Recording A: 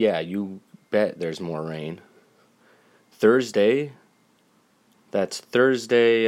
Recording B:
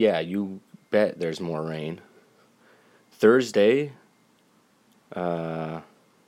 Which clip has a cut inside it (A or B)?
A